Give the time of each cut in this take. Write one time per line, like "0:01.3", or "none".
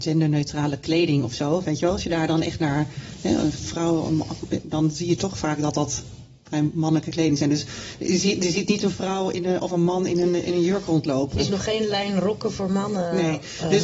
none